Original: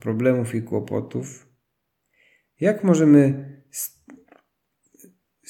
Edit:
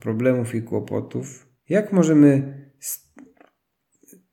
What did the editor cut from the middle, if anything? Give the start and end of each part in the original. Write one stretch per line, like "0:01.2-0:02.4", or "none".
0:01.6-0:02.5